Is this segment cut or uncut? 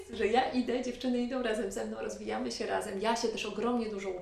uncut